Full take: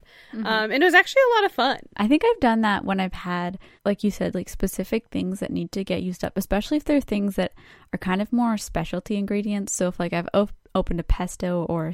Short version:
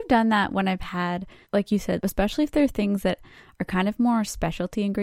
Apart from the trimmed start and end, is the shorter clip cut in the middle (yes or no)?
yes